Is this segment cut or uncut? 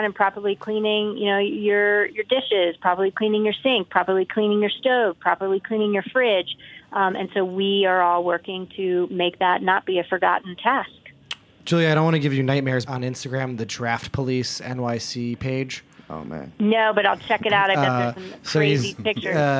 cut